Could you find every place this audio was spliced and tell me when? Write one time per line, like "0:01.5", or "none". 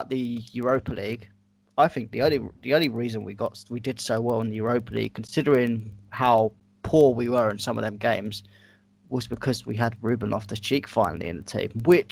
none